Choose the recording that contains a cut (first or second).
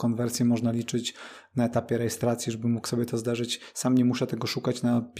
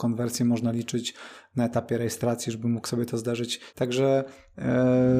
second